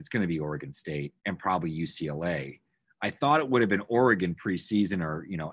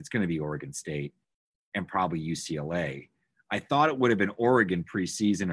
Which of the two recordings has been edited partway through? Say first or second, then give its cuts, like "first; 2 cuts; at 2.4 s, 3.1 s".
first; 1 cut; at 1.2 s